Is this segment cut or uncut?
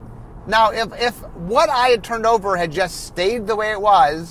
uncut